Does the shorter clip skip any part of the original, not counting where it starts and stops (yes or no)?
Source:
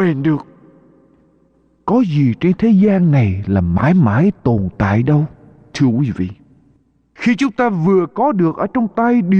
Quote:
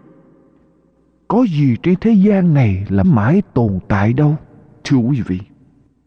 yes